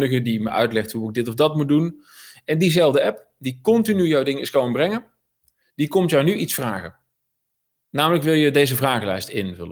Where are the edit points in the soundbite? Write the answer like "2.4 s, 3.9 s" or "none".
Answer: none